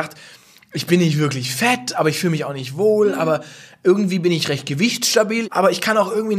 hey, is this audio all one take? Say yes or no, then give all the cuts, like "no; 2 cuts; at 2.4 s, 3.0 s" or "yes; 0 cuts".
no; 1 cut; at 5.4 s